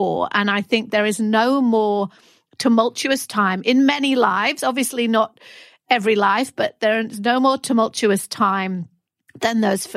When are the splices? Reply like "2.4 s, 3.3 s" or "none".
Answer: none